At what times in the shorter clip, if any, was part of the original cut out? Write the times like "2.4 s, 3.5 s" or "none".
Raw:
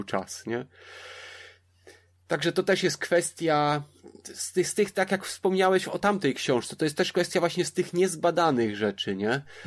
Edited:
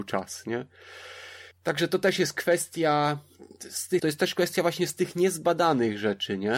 1.5 s, 4.0 s